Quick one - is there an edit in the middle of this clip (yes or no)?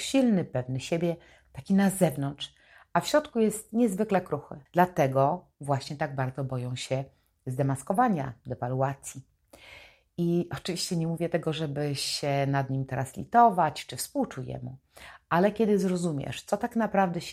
yes